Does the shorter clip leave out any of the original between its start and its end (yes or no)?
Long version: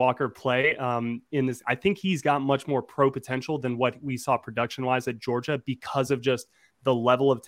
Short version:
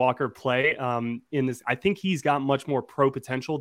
no